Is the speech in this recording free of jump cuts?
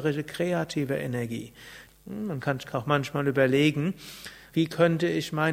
no; 2 cuts; at 1.9 s, 4.5 s

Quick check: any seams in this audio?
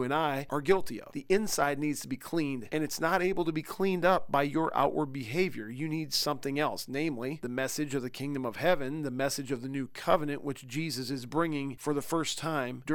yes; 1 cut; at 1.1 s

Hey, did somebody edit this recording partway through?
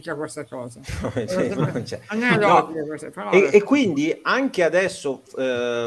no; 0 cuts

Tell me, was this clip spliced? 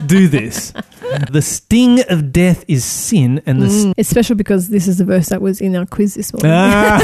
yes; 2 cuts; at 1.3 s, 3.9 s

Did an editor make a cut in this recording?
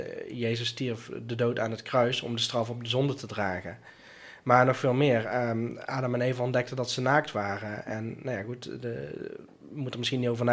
no; 0 cuts

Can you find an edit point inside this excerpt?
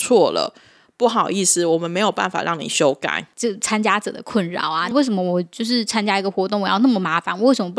yes; 2 cuts; at 3.3 s, 4.9 s

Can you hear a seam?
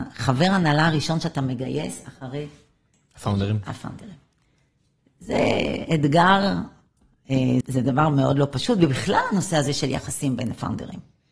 yes; 1 cut; at 7.6 s

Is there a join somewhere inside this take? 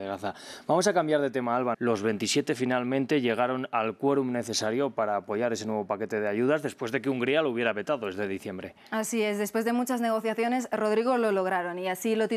yes; 1 cut; at 1.7 s

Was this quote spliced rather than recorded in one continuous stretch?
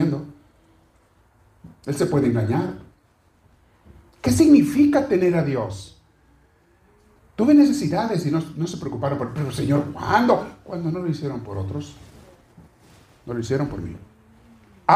yes; 1 cut; at 7.2 s

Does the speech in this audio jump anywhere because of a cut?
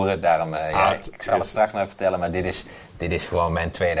no; 0 cuts

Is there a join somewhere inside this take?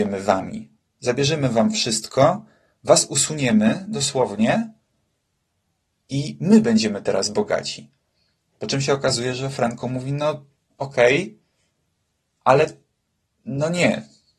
no; 0 cuts

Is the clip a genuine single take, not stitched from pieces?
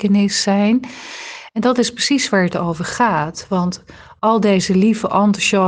yes; 0 cuts

